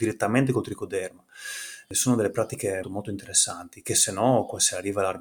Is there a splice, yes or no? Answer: yes